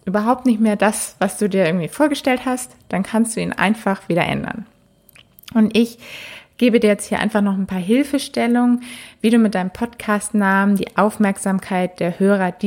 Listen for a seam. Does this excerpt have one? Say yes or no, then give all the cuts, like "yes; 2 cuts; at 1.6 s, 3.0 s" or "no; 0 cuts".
no; 0 cuts